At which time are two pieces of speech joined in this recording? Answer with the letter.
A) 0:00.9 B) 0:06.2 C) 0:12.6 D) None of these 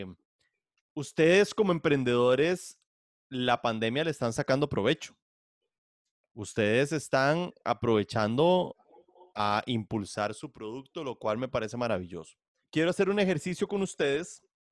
C